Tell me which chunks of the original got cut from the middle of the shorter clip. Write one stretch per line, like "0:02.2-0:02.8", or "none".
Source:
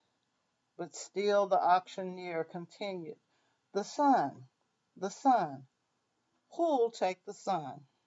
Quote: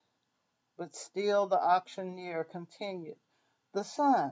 none